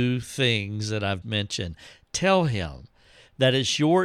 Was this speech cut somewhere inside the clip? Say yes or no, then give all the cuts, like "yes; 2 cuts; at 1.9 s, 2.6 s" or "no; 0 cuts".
yes; 1 cut; at 1.2 s